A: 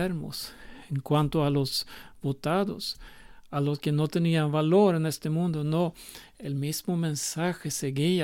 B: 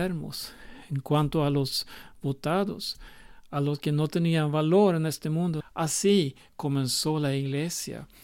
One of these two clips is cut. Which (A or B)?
B